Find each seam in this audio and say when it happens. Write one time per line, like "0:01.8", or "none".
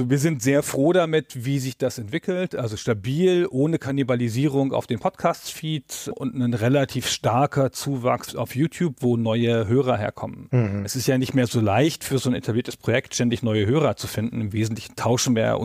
0:09.0